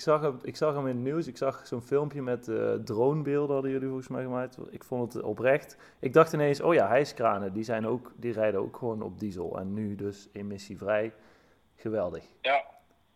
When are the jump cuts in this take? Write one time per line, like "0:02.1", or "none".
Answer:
none